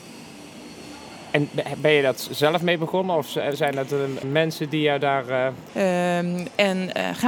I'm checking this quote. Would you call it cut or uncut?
cut